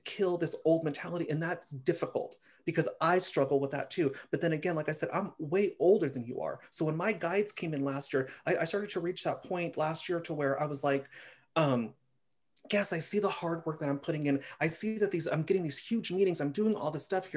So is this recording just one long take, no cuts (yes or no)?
yes